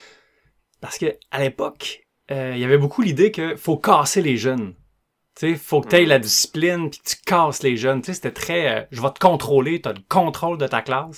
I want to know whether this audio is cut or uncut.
uncut